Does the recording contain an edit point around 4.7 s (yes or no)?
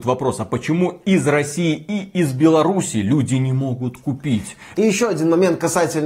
yes